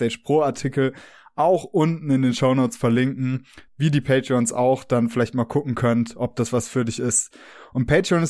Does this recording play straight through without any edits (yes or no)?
no